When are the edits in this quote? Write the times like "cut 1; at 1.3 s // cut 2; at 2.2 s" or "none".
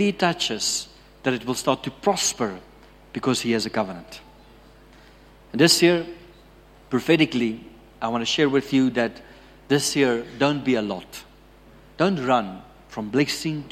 none